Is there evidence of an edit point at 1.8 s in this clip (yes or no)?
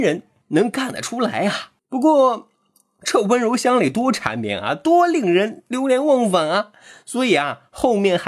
yes